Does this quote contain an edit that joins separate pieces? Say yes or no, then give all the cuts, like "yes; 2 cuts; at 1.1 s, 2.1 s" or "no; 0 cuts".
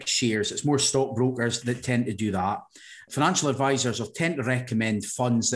yes; 1 cut; at 1.6 s